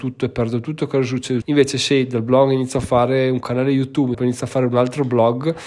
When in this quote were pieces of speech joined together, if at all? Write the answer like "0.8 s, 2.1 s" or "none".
1.4 s, 4.1 s